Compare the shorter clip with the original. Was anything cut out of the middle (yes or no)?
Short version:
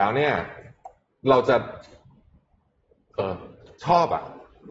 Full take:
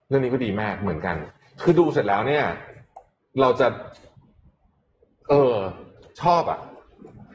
yes